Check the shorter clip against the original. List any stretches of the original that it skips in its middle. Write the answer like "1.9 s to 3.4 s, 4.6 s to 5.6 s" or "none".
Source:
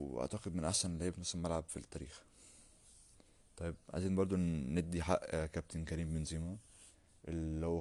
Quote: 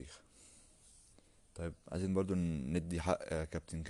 none